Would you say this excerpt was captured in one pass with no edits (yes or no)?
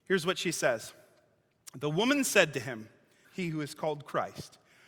no